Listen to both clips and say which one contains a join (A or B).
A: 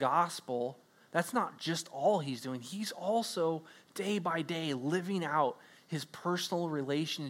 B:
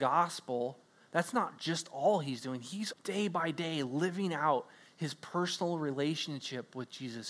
B